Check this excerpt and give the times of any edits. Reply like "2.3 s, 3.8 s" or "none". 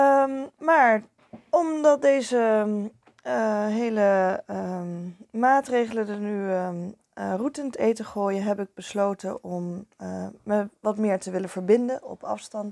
none